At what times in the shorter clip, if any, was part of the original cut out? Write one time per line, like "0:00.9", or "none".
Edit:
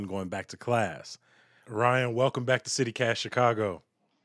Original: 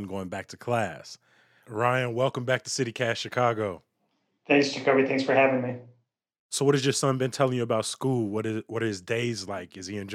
none